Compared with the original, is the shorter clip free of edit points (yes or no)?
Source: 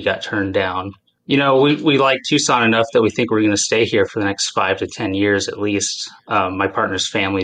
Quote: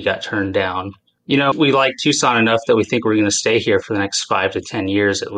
no